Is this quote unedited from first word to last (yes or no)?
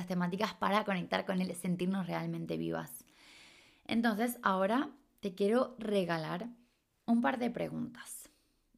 yes